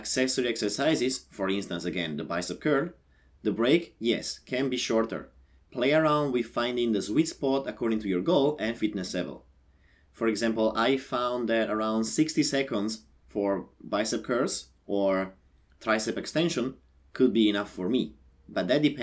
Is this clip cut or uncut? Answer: uncut